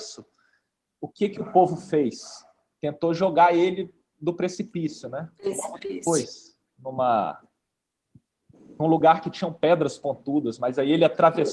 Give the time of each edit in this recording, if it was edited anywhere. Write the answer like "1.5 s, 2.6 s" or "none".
none